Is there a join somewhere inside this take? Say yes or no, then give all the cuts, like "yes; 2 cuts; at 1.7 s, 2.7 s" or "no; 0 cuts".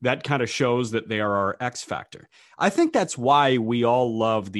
no; 0 cuts